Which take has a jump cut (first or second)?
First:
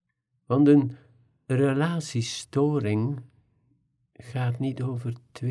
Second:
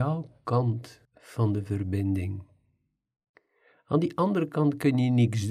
second